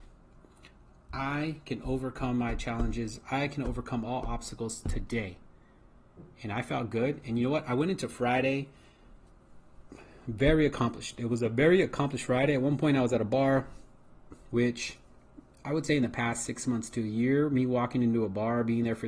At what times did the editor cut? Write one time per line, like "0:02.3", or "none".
0:14.5